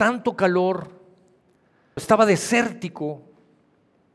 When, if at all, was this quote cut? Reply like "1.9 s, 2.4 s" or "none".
2.0 s